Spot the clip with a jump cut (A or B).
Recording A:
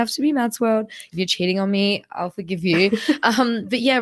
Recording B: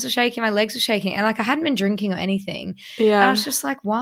A